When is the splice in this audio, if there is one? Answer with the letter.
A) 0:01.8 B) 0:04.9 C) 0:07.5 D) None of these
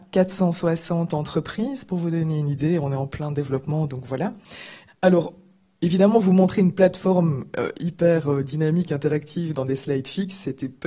B